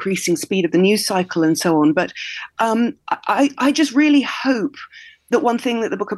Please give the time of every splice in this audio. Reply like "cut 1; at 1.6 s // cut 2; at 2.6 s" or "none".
none